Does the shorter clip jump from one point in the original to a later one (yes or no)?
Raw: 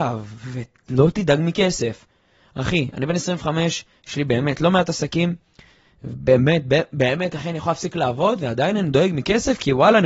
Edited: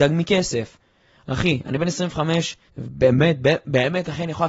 yes